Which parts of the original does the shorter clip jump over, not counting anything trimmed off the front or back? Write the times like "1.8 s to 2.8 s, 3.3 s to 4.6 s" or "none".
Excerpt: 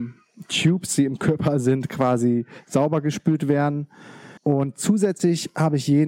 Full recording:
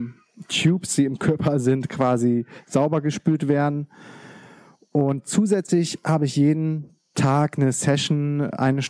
4.4 s to 4.9 s